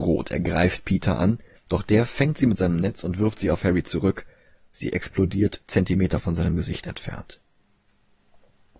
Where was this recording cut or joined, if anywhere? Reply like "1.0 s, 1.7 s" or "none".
1.5 s